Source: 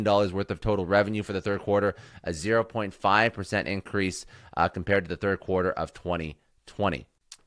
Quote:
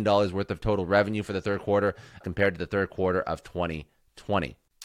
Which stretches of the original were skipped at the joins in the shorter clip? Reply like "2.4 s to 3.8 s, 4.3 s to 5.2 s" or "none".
2.2 s to 4.7 s

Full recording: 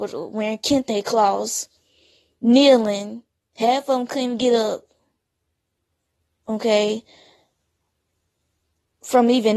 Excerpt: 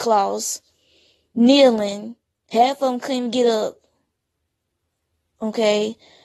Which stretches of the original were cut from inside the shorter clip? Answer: none

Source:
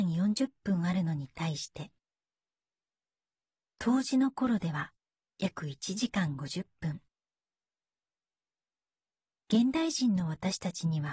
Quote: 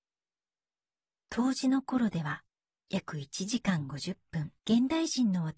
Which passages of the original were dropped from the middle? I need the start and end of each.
7.1 s to 9.4 s

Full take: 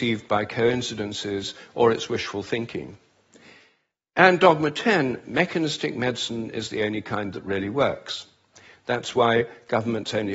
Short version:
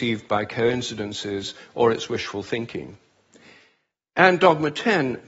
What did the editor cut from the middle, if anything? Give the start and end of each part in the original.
none

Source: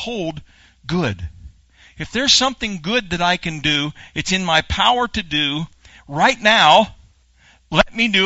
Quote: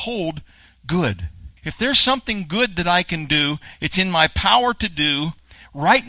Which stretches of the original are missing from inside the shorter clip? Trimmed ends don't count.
1.6 s to 1.9 s

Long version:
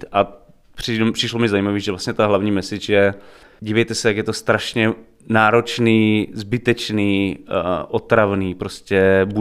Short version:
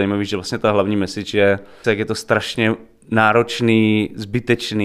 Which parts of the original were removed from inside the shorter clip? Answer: 3.4 s to 4.0 s

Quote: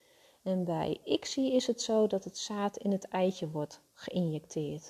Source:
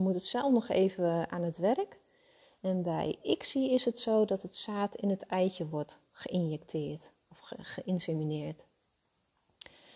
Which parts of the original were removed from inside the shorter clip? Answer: none

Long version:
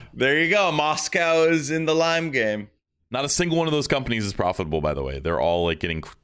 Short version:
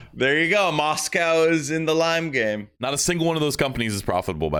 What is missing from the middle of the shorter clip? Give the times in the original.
2.7 s to 3.1 s

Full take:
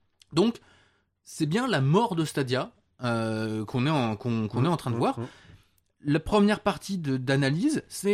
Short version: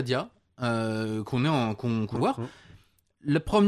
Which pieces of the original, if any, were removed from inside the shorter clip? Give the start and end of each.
4.6 s to 5.0 s

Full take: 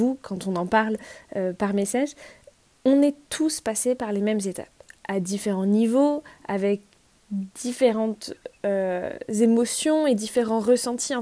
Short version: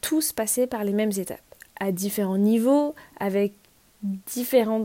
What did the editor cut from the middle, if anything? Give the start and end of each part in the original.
none

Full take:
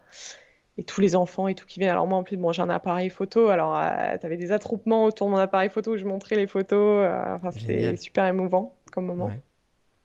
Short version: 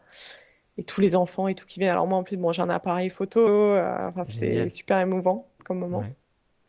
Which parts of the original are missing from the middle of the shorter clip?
3.5 s to 6.7 s

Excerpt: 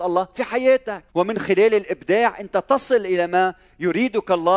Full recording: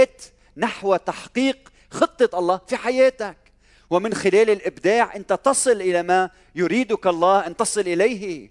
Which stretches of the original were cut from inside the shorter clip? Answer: 3.4 s to 3.8 s

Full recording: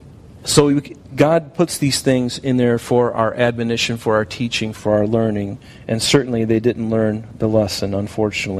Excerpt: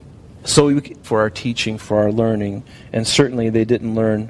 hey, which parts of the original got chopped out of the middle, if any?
1.0 s to 4.0 s

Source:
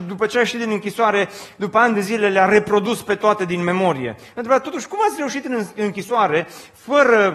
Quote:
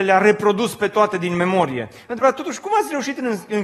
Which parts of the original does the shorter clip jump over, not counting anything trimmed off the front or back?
none

